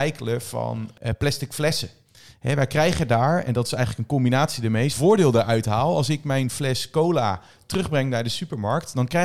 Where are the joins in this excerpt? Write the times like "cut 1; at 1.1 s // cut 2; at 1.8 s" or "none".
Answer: cut 1; at 4.9 s

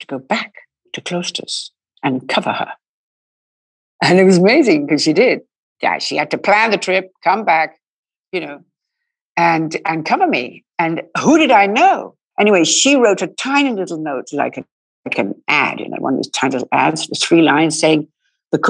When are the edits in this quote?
cut 1; at 12.3 s

